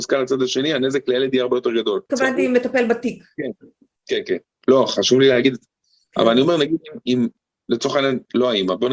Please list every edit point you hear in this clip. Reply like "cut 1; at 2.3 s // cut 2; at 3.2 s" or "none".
cut 1; at 2.1 s